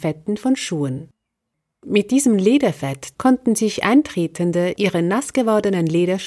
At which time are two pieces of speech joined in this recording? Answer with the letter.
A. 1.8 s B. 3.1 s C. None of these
B